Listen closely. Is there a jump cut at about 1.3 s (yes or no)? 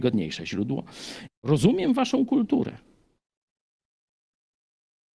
yes